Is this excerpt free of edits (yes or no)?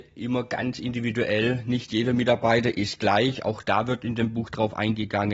yes